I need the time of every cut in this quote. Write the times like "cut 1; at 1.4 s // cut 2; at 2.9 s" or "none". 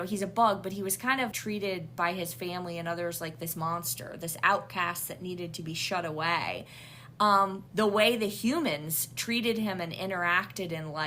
cut 1; at 1.3 s // cut 2; at 7.7 s